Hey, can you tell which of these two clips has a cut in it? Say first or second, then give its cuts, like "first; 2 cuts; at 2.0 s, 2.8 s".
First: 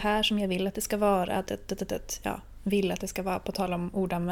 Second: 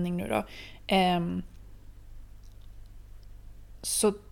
first; 1 cut; at 1.5 s